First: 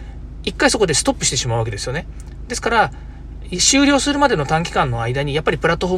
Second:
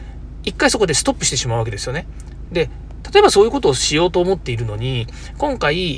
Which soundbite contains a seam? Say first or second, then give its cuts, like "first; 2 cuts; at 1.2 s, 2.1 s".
second; 1 cut; at 2.5 s